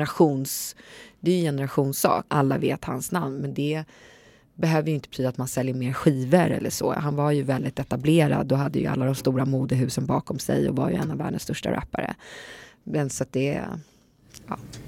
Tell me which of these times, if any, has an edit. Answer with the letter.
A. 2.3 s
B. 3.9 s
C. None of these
A